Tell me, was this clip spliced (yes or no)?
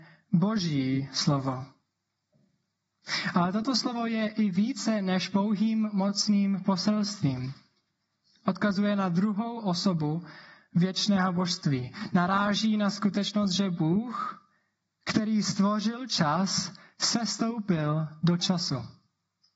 no